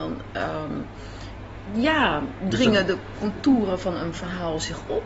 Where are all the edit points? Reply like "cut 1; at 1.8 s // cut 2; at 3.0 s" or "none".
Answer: cut 1; at 1.7 s